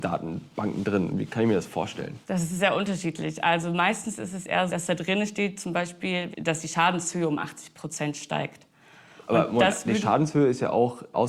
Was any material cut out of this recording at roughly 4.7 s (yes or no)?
yes